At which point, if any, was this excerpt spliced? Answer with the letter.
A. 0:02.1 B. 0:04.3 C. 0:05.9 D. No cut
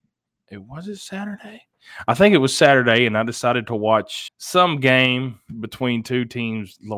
B